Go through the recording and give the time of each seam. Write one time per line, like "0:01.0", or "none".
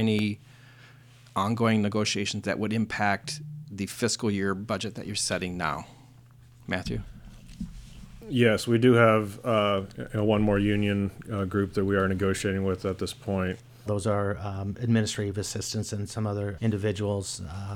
0:13.9
0:16.6